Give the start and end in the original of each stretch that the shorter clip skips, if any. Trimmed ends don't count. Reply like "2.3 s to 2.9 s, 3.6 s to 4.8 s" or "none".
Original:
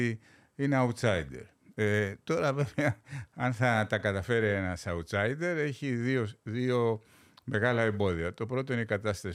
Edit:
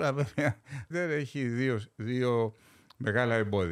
3.3 s to 5.4 s